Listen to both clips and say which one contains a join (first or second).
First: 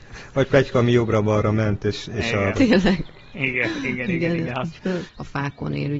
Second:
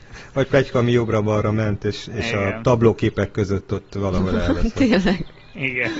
first